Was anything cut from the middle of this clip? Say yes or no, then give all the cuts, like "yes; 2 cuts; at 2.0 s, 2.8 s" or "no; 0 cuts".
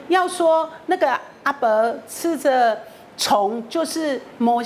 no; 0 cuts